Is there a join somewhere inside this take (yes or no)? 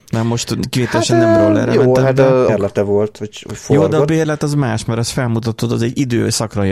yes